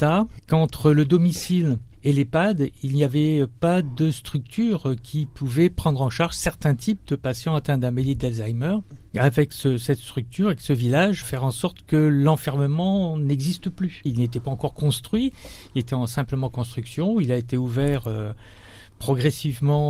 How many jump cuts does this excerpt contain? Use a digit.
2